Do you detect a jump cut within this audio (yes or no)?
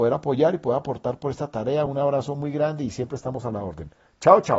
no